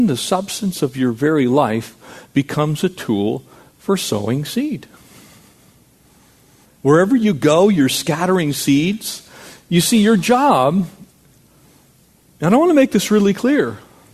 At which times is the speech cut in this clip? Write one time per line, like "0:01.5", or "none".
0:06.6